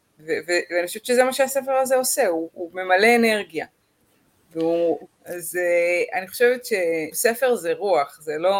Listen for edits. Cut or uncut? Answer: cut